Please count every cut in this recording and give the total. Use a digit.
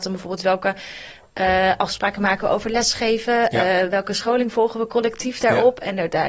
0